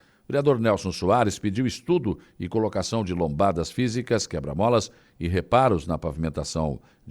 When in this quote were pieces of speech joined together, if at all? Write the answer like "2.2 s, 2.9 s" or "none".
none